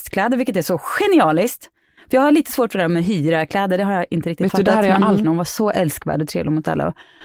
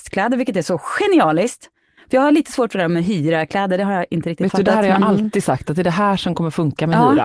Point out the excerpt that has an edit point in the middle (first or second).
first